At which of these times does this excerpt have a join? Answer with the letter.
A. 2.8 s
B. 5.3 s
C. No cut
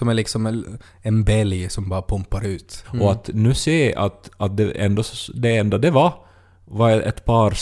A